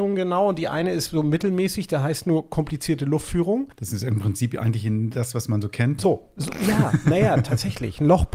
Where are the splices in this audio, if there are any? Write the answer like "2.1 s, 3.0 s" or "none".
3.7 s, 6.0 s

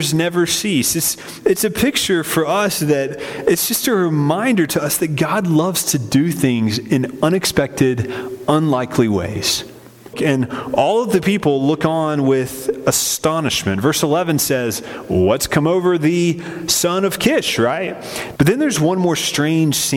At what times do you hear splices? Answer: 10.1 s, 18.4 s

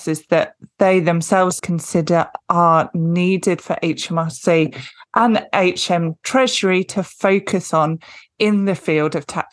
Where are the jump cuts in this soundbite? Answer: 1.6 s

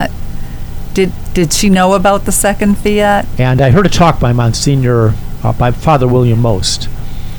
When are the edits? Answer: 3.4 s

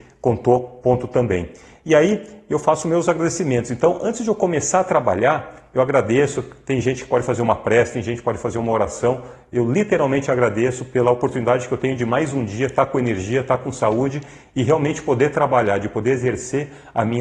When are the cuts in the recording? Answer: none

